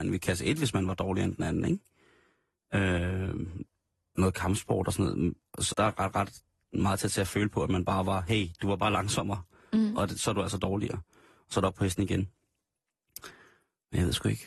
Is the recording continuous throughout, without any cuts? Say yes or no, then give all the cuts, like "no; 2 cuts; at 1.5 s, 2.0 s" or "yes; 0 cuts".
no; 1 cut; at 5.7 s